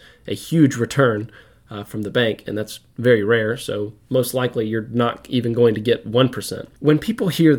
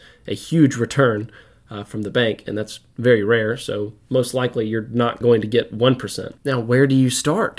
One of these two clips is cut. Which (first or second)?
second